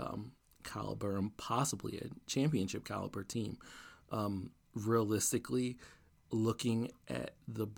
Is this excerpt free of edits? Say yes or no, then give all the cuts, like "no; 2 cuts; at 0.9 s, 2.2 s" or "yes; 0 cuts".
yes; 0 cuts